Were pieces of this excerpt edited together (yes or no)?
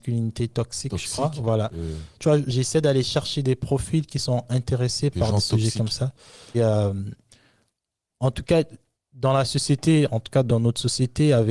yes